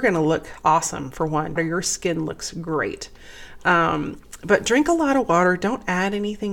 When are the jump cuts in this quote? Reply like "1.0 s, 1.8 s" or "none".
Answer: 1.6 s

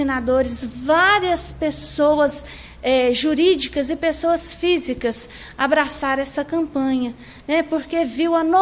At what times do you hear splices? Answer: none

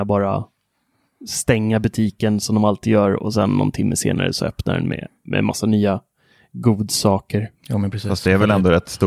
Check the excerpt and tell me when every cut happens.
none

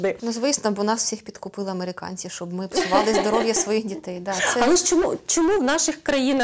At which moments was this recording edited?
none

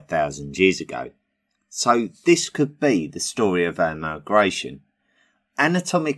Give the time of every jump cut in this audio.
1.5 s

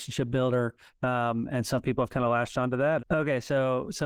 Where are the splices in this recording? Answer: 0.9 s, 3.0 s

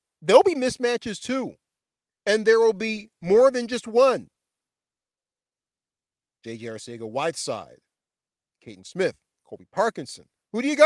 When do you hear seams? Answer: 8.5 s

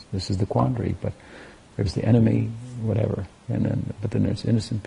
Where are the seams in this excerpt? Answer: none

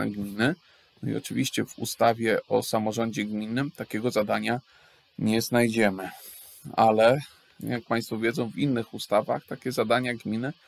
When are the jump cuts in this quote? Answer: none

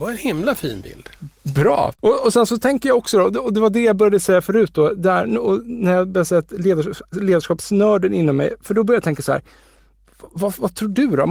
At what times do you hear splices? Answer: 1.9 s

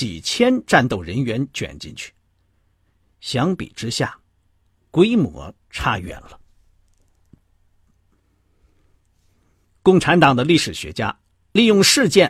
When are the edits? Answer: none

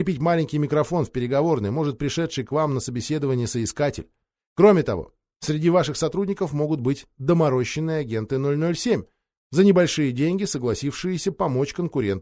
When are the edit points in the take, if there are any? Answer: none

